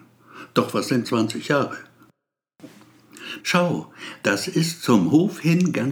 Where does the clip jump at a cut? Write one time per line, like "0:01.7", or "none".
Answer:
0:01.0
0:03.4